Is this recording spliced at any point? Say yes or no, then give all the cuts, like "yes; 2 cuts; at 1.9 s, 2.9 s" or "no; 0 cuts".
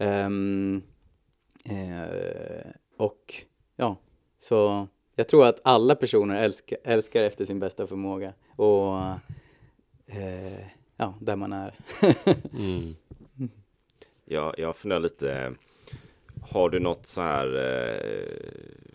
no; 0 cuts